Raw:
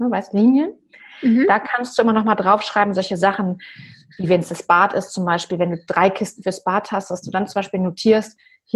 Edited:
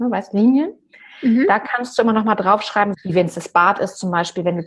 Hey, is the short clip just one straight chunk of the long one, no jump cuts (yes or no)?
no